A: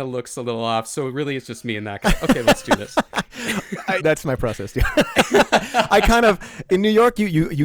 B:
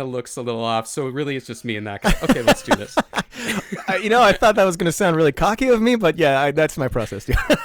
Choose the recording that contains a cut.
A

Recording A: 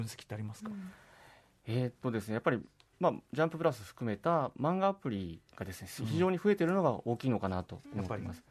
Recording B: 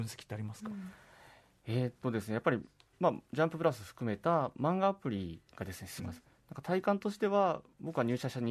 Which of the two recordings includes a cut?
B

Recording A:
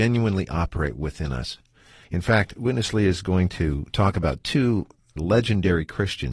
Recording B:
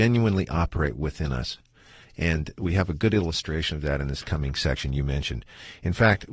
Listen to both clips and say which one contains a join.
A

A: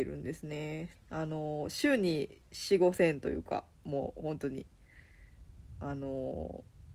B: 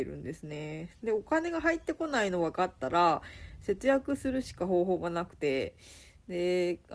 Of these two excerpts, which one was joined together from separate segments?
A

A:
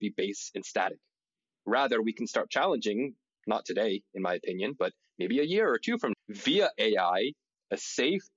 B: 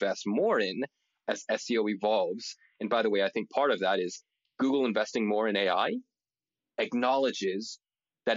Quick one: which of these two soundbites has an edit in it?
A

